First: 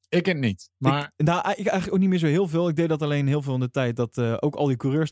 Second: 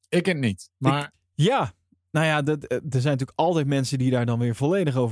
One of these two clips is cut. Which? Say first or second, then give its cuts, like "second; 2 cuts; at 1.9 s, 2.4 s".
second; 1 cut; at 1.1 s